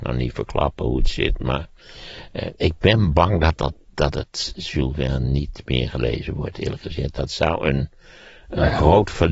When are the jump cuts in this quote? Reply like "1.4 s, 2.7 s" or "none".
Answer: none